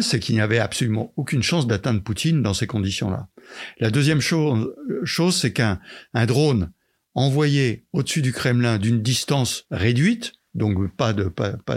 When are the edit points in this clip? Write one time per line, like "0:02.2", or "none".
none